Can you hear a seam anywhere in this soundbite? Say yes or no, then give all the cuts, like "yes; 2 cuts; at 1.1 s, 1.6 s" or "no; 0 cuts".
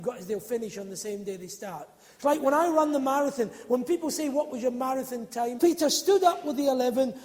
yes; 1 cut; at 5.6 s